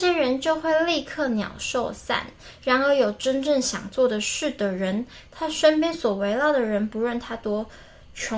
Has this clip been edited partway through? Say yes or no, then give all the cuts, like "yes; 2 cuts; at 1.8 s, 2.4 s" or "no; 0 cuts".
no; 0 cuts